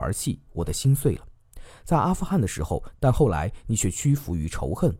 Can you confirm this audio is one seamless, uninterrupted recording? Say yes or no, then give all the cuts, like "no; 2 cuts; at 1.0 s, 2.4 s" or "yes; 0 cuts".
no; 1 cut; at 2.9 s